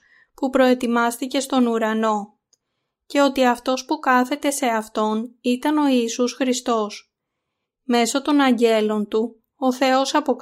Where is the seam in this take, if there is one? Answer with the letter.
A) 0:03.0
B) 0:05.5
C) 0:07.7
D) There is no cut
C